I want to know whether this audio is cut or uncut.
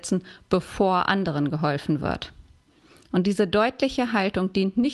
uncut